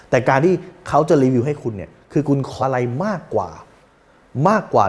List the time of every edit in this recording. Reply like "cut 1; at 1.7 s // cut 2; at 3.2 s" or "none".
cut 1; at 2.6 s